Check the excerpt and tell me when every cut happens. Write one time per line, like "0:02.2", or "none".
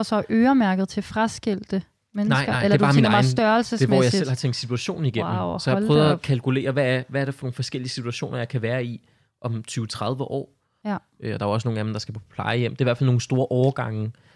0:10.8